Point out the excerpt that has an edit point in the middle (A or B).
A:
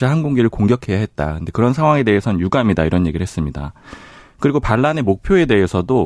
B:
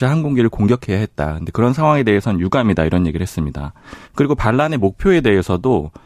B